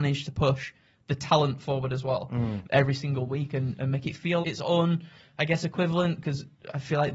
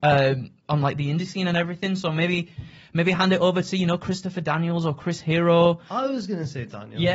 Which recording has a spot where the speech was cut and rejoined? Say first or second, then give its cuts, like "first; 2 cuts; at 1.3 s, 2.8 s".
first; 2 cuts; at 2.6 s, 4.4 s